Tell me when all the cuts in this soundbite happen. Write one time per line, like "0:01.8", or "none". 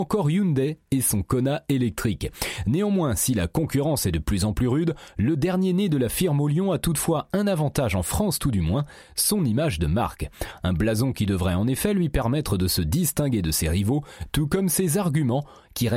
none